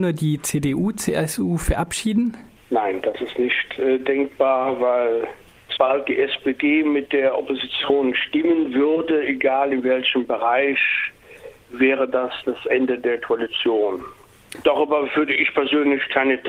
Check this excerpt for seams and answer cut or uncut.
cut